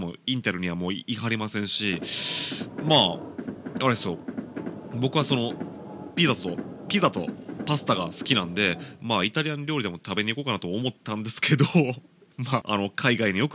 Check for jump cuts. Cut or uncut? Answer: cut